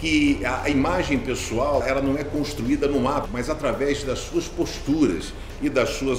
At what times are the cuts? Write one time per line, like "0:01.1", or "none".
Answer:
0:01.8
0:03.3